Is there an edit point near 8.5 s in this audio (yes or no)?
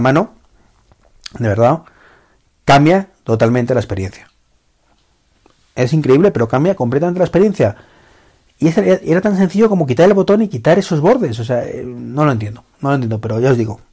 no